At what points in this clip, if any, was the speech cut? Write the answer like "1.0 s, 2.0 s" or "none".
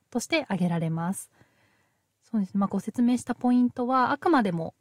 2.7 s